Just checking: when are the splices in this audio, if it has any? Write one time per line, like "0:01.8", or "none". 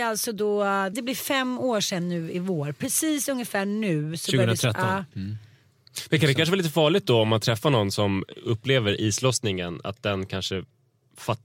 0:00.9